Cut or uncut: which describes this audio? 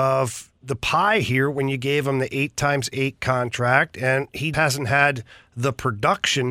cut